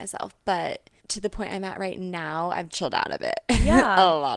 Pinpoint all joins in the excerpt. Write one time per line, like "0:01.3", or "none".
0:01.0
0:02.7